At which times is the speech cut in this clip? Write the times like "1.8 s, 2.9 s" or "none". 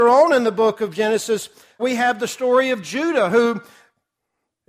1.8 s